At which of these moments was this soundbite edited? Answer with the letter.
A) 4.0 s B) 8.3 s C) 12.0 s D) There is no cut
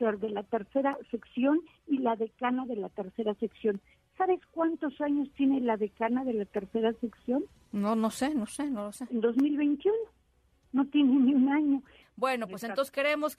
C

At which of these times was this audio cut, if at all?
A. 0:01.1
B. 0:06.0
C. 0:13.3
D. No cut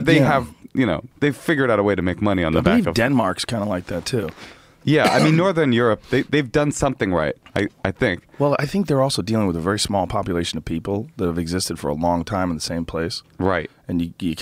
A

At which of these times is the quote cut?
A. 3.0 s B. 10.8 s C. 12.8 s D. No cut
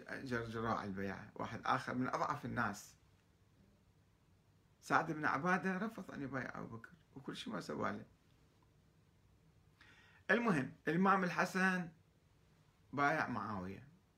B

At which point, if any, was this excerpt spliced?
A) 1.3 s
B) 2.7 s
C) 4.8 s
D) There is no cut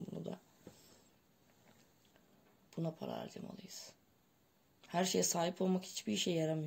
B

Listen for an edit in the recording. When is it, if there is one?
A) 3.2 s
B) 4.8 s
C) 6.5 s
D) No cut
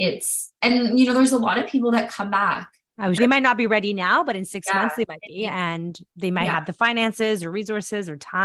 A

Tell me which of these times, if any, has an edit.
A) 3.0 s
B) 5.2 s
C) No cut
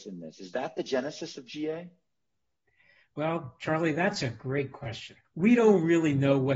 B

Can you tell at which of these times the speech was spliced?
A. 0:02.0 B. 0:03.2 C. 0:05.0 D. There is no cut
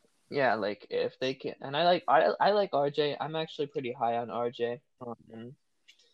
C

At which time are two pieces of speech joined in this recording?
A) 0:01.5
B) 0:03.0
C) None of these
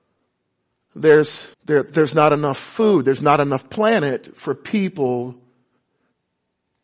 A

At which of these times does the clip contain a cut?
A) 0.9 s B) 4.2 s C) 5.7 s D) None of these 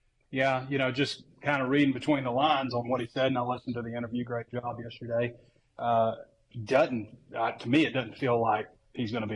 D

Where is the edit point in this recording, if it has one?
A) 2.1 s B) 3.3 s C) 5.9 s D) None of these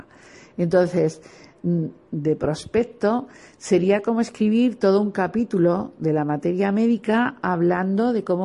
A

